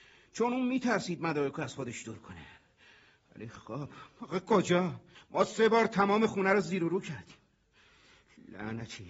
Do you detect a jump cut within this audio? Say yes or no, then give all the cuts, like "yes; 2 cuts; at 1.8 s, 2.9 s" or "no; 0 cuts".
yes; 1 cut; at 5.2 s